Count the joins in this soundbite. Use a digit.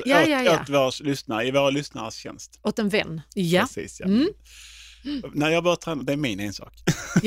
1